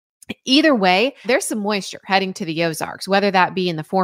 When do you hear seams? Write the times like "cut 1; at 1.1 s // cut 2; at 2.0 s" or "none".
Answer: cut 1; at 1.2 s